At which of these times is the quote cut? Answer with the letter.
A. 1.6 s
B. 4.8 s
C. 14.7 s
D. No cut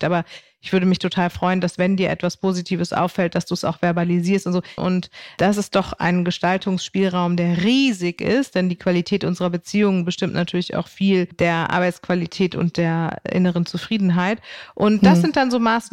B